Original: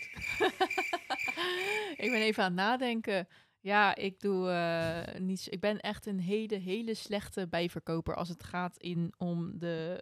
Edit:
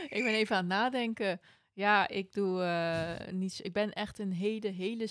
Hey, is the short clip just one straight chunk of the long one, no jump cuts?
yes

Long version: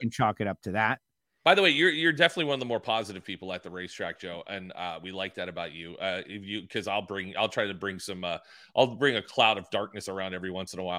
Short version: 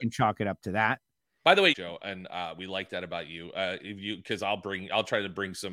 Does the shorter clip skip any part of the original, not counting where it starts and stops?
yes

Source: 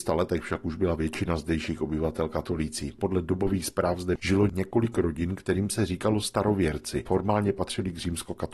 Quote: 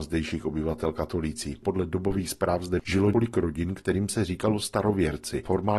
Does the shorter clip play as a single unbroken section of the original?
no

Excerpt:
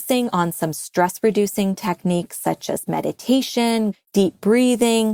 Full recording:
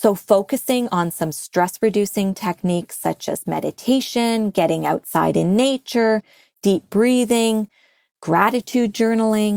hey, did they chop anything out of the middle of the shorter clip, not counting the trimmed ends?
yes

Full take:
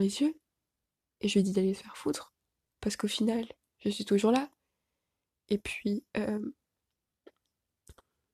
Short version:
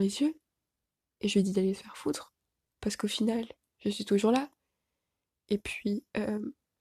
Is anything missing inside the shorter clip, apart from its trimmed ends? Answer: no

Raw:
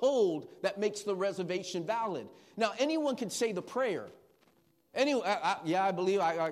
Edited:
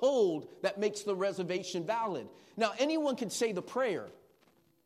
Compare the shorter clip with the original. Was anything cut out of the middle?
no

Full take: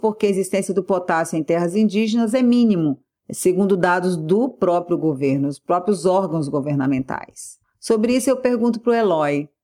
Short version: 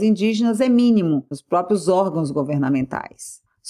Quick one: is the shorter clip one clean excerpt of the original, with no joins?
no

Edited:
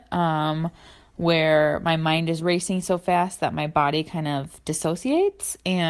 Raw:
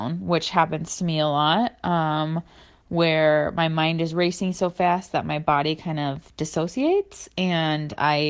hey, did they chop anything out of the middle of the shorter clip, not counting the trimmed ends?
no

